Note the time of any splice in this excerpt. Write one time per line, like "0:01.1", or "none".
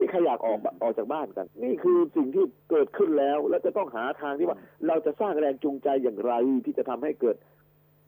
0:01.5
0:02.6